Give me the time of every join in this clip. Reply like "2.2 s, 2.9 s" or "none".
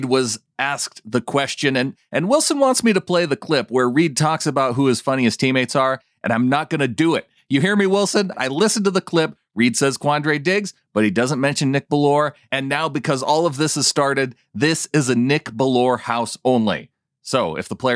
8.3 s